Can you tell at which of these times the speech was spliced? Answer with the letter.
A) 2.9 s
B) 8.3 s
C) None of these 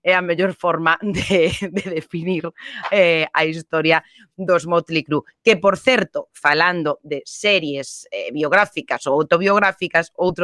C